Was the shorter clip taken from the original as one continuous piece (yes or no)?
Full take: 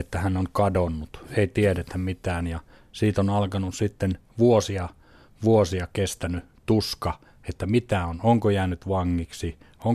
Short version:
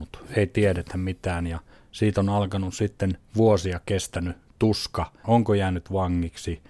no